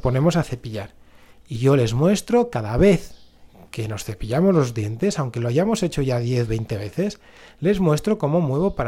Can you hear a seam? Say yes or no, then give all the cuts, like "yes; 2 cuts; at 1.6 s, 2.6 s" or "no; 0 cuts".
no; 0 cuts